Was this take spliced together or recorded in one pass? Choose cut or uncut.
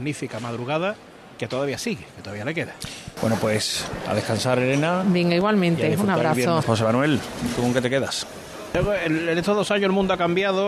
cut